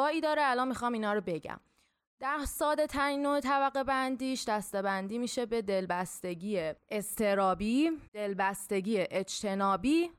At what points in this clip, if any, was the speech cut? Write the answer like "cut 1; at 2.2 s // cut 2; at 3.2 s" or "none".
cut 1; at 8.1 s